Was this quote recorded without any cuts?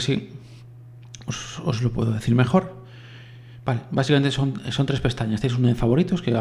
yes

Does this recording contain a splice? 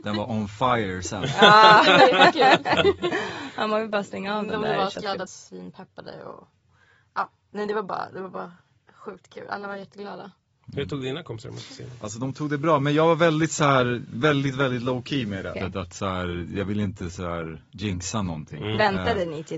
yes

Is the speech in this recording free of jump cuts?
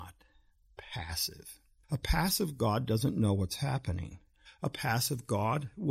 no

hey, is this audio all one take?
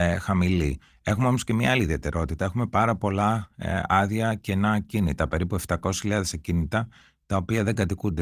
yes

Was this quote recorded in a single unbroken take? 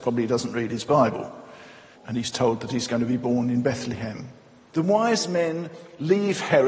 no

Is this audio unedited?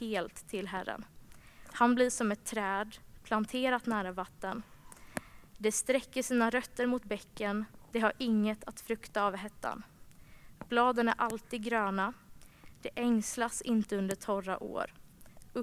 yes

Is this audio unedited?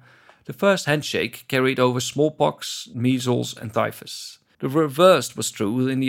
no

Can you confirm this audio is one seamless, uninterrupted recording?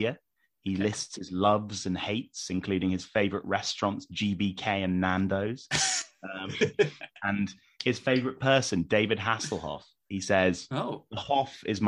yes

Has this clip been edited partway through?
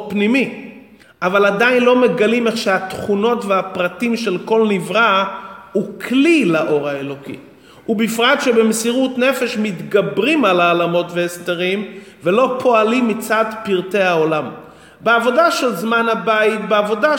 yes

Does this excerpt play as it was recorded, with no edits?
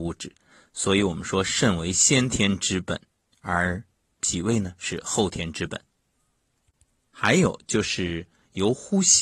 yes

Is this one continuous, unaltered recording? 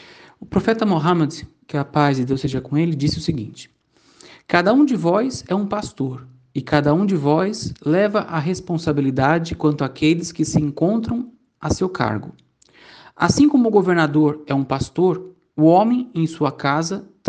yes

